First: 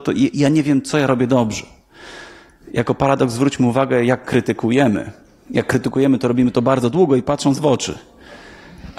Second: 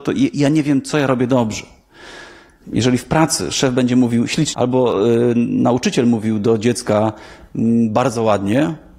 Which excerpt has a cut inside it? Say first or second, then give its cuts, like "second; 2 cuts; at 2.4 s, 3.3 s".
second; 2 cuts; at 2.6 s, 4.5 s